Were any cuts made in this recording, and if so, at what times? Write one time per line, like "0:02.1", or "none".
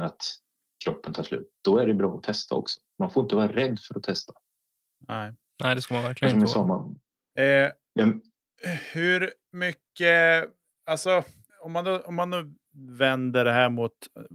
0:11.5